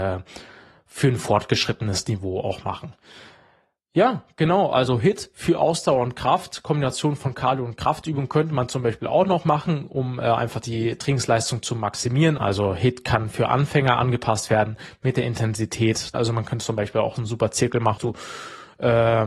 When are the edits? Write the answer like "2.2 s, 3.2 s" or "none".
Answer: 12.4 s, 16.1 s, 18.0 s